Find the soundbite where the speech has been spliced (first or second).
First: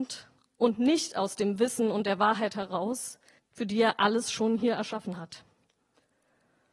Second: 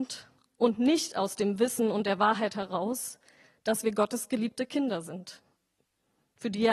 first